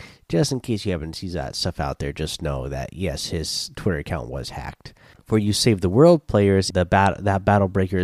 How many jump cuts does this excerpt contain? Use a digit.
2